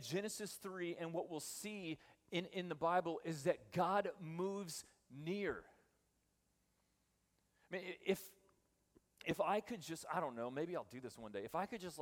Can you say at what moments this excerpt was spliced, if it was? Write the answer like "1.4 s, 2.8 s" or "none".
none